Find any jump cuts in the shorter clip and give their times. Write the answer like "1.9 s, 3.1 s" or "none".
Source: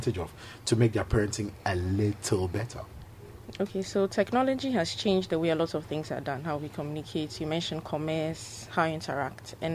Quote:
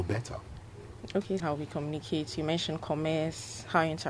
1.4 s